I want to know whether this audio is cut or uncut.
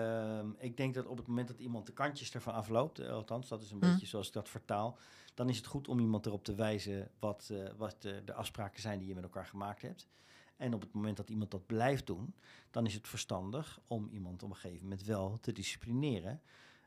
uncut